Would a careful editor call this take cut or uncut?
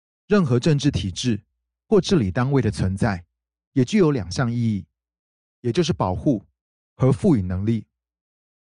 uncut